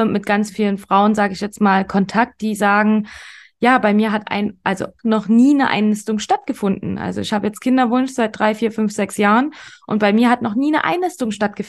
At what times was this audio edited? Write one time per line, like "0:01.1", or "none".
0:05.0